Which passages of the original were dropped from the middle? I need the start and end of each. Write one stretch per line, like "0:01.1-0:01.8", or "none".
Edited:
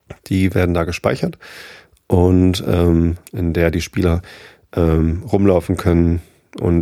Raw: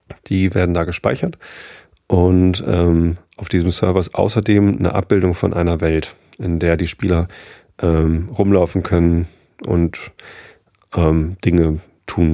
0:03.2-0:06.3